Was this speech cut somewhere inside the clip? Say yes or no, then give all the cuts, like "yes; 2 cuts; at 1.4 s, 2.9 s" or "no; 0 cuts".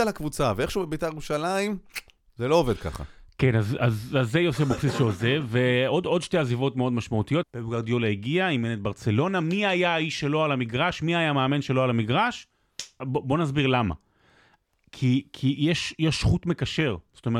yes; 2 cuts; at 7.4 s, 13.0 s